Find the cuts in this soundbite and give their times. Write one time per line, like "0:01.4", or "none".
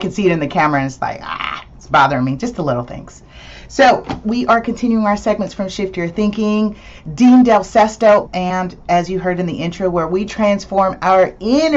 0:04.2
0:08.2